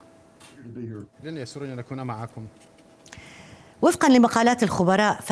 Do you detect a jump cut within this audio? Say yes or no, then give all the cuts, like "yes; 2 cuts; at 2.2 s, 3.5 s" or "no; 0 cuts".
yes; 1 cut; at 1.1 s